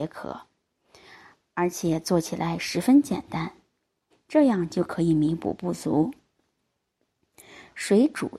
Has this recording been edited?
yes; 1 cut; at 4.1 s

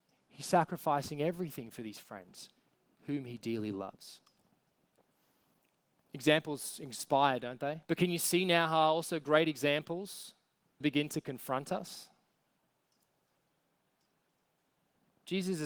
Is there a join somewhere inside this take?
yes; 2 cuts; at 7.8 s, 10.8 s

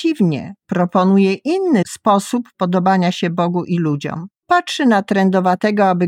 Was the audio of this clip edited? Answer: yes; 1 cut; at 4.4 s

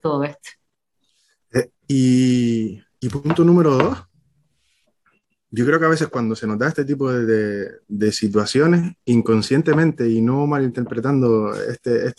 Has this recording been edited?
yes; 1 cut; at 1.7 s

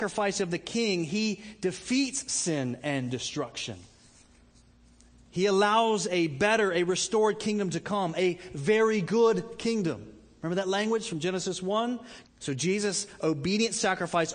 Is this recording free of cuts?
no; 1 cut; at 12.3 s

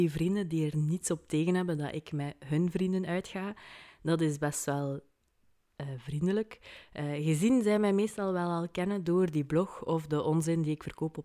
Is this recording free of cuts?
yes; 0 cuts

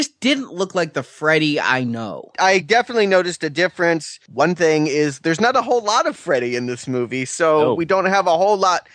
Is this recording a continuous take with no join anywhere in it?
yes; 0 cuts

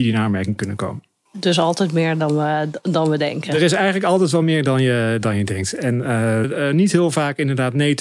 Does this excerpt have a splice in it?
yes; 1 cut; at 6.4 s

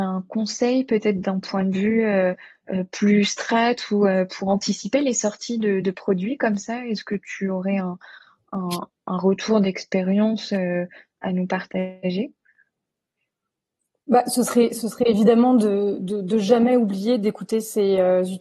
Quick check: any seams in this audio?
no; 0 cuts

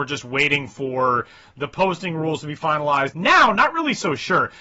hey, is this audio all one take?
no; 1 cut; at 3.1 s

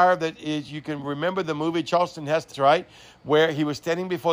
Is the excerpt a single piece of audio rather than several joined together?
no; 1 cut; at 2.5 s

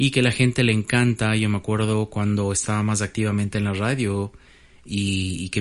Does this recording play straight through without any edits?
yes; 0 cuts

